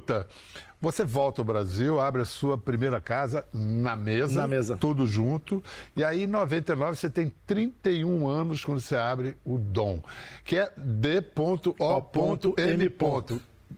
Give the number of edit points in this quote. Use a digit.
0